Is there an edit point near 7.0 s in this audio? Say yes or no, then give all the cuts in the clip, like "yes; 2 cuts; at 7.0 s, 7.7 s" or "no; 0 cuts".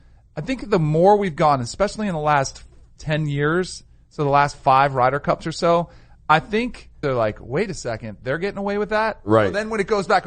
yes; 1 cut; at 7.0 s